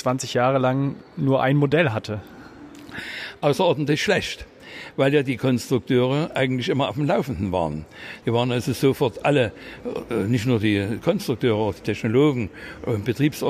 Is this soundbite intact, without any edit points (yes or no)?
no